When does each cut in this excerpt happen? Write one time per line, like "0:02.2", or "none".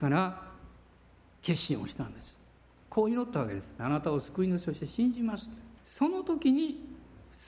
0:03.8
0:05.8

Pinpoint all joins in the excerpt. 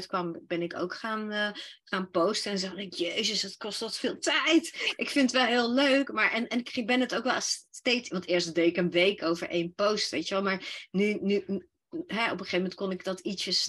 none

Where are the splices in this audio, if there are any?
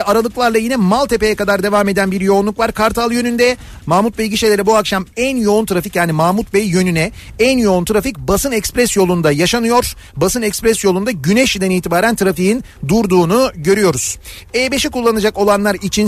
0:03.8

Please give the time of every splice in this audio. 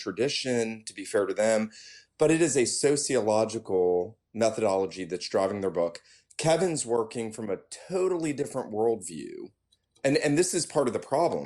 none

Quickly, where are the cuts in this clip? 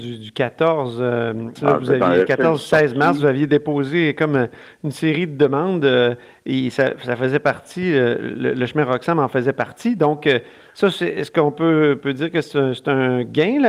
0:01.6

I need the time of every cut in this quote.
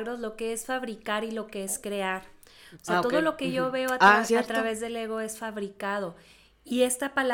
0:02.7
0:04.3

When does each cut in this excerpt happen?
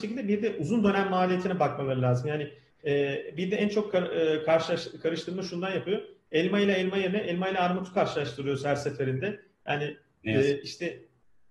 none

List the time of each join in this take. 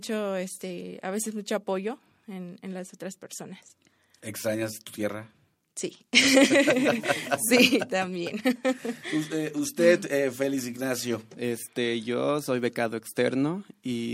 none

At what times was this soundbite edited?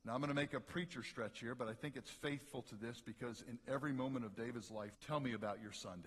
0:04.9

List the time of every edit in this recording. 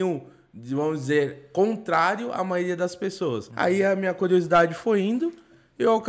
0:03.5

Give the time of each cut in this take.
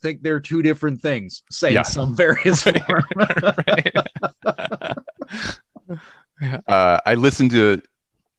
none

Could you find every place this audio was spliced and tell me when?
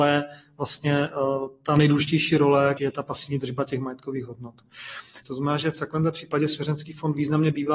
0:02.8
0:05.2

